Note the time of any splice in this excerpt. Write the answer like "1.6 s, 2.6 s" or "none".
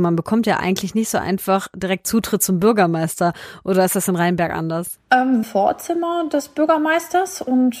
5.4 s